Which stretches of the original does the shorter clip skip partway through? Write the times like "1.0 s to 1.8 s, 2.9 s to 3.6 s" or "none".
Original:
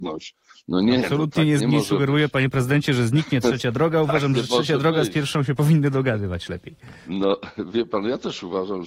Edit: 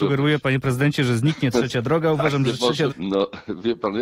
4.8 s to 7.0 s